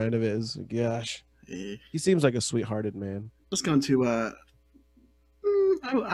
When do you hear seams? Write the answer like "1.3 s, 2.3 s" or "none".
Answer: 3.4 s

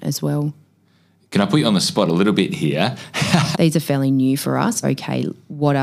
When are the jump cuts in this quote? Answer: 3.5 s, 4.8 s

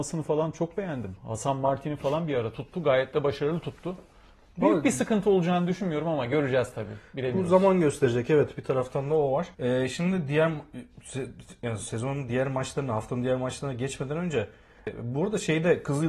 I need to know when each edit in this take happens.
9.5 s

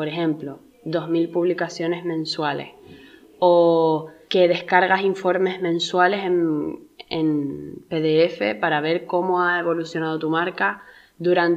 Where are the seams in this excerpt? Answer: none

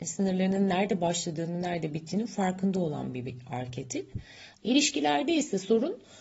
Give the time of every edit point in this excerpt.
4.5 s

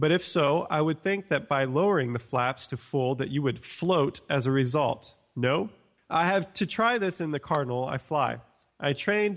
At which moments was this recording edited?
none

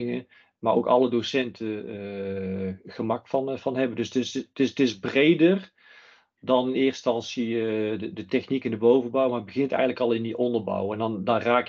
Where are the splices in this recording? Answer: none

